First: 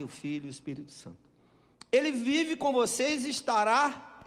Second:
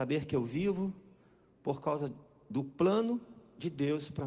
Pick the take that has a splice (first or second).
first